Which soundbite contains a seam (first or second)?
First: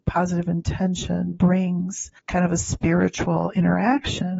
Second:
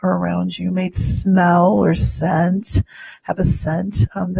first